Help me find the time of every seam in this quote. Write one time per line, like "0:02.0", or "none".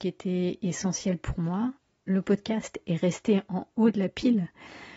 none